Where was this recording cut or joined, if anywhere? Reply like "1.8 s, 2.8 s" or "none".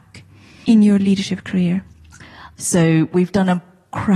2.5 s

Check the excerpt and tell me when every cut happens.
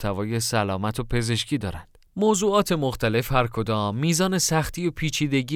2.1 s

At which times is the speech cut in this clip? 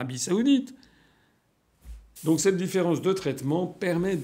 2.2 s

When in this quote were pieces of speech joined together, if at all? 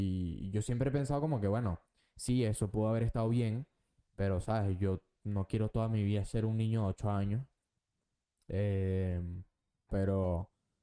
9.9 s

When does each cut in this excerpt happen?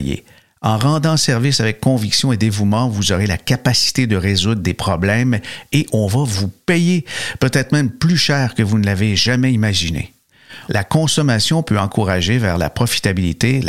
10.7 s

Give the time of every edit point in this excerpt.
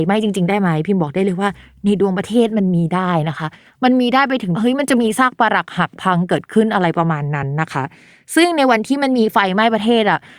none

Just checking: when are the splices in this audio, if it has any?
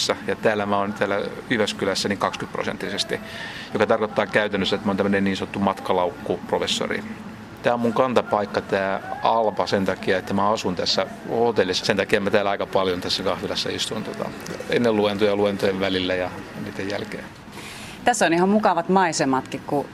7.6 s, 11.8 s

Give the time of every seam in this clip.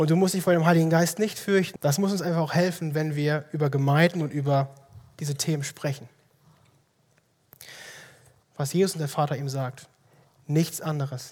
1.8 s, 8.4 s

